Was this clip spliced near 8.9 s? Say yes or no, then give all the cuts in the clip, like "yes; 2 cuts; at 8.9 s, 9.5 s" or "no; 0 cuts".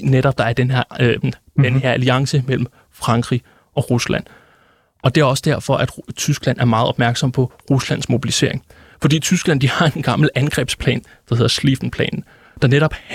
no; 1 cut; at 1.2 s